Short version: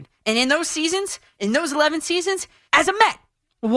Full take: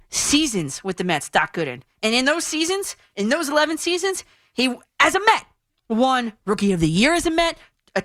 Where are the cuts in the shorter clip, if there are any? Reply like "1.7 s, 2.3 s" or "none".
2.7 s